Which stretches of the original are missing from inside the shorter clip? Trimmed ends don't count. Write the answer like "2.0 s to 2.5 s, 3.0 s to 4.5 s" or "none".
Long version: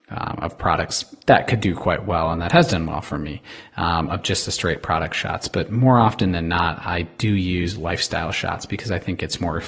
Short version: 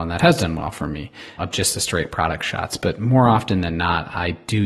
3.7 s to 4.1 s